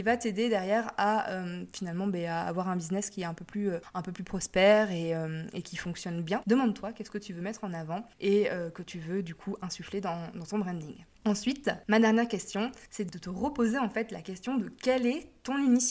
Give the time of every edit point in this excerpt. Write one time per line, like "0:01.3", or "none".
0:06.4